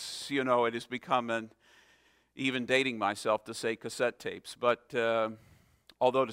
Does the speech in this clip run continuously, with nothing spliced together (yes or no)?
yes